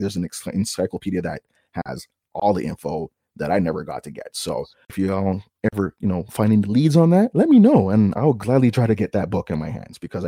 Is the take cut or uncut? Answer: uncut